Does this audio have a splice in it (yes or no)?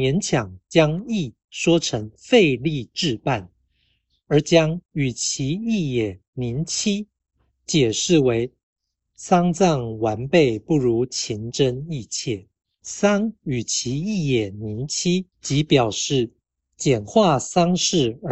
yes